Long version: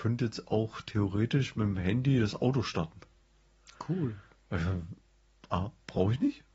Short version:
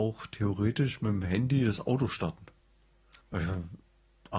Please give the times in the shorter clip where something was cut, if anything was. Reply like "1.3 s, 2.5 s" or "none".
3.2 s